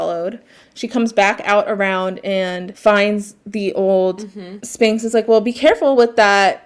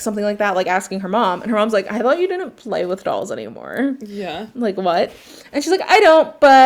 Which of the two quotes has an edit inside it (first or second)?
first